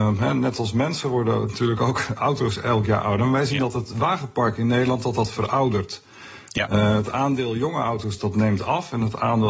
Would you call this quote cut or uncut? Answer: uncut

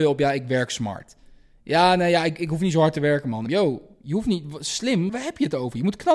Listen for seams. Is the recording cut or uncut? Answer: cut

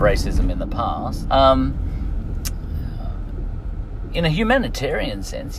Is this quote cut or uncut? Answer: cut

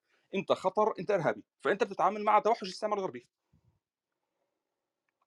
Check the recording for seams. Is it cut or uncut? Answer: cut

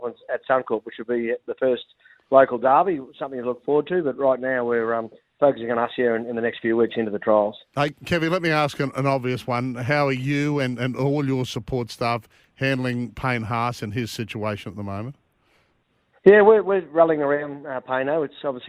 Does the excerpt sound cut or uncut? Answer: uncut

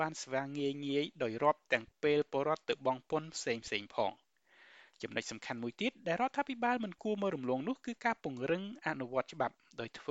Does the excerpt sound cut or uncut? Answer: cut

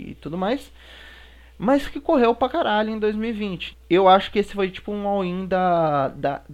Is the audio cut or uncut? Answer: cut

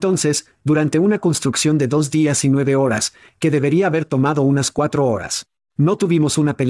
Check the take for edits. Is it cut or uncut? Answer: uncut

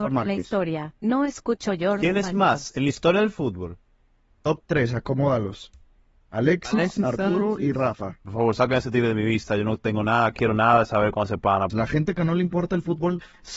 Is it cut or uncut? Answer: cut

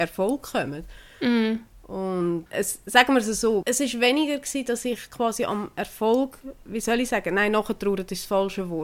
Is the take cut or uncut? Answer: cut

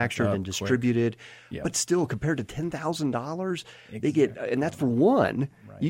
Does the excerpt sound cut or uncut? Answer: uncut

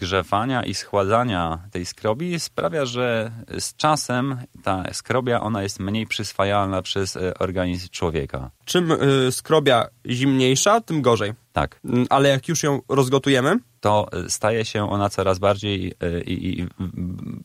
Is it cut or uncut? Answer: uncut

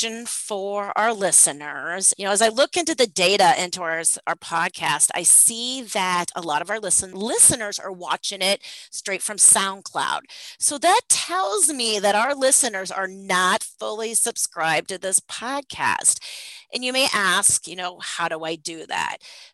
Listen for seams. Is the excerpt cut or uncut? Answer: cut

